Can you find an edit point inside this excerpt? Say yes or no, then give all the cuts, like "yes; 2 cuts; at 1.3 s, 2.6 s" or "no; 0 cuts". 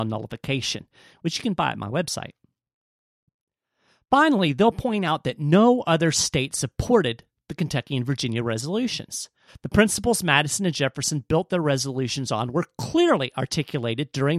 yes; 1 cut; at 9.5 s